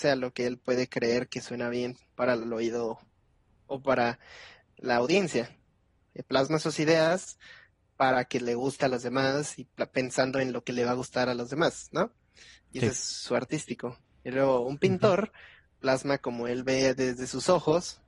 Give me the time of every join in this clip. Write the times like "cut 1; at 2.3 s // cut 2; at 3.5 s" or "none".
none